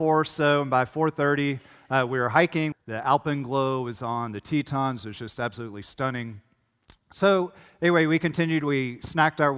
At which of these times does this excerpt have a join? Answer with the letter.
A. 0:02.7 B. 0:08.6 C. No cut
A